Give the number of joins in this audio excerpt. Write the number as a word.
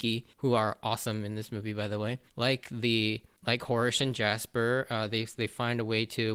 one